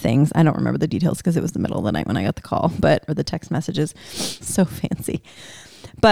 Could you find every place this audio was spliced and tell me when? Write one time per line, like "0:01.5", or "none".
0:03.1
0:04.4